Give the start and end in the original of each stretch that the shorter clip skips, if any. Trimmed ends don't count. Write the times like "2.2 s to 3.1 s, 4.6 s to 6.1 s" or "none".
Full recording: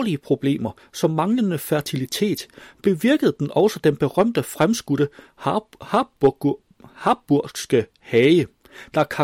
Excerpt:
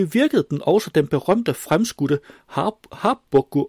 none